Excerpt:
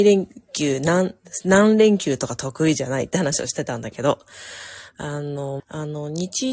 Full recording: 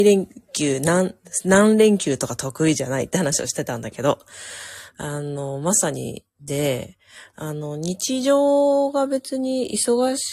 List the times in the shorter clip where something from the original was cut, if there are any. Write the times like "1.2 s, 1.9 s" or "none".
5.6 s